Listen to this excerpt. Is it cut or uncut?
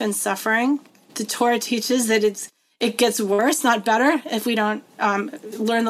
uncut